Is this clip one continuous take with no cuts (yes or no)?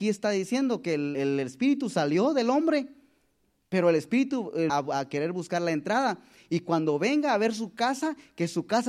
no